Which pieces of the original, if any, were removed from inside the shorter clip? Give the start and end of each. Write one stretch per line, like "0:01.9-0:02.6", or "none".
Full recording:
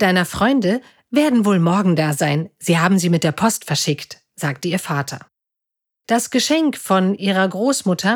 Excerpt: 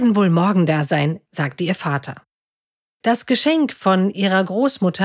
0:02.6-0:04.3